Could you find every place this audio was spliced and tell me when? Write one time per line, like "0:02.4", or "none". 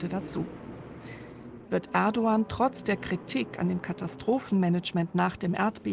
0:01.6